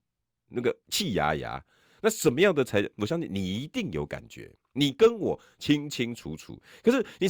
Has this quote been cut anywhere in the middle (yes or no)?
no